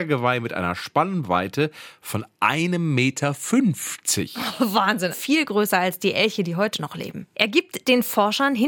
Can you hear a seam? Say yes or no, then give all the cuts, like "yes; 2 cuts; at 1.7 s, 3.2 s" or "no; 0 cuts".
yes; 2 cuts; at 5.1 s, 7.3 s